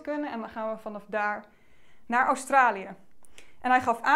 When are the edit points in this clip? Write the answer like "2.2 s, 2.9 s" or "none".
none